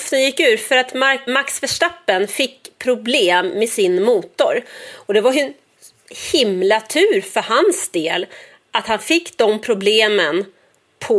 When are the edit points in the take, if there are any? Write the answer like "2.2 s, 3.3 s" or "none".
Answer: 1.3 s